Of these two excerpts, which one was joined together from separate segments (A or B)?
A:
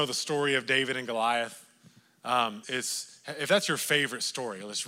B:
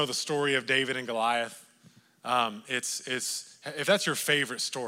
A